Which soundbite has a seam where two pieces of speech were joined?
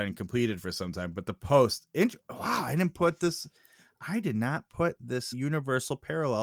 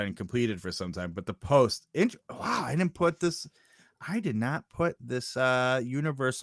first; 1 cut; at 5.3 s

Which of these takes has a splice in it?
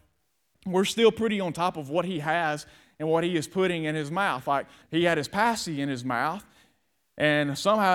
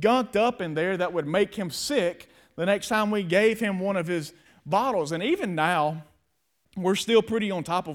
first; 1 cut; at 4.8 s

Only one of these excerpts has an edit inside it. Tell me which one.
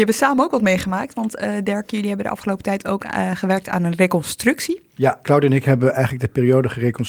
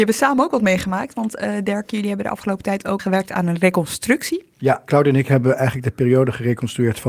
second; 1 cut; at 3.0 s

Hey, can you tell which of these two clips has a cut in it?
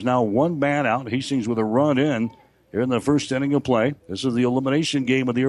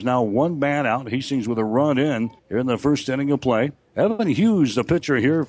second; 2 cuts; at 2.4 s, 3.7 s

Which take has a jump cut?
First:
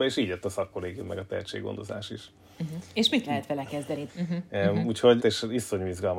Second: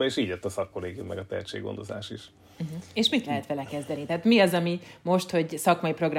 first; 2 cuts; at 4.1 s, 5.2 s

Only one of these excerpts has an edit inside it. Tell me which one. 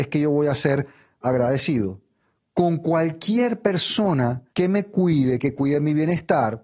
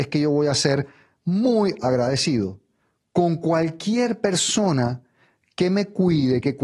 first; 2 cuts; at 1.2 s, 4.5 s

